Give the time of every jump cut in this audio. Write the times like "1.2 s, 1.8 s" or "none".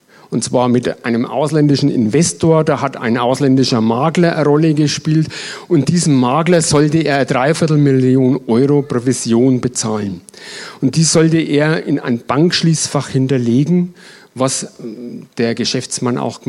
none